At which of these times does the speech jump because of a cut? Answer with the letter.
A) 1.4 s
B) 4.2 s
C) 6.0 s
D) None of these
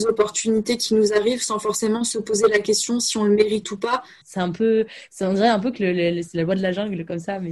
B